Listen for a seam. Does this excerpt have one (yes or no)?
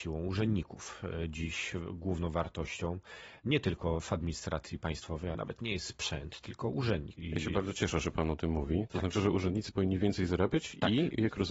yes